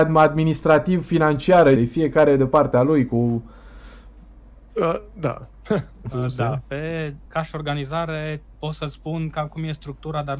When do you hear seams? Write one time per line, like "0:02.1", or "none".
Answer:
0:01.8
0:06.1
0:07.3